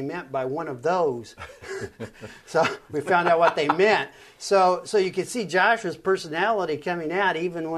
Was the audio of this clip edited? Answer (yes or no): no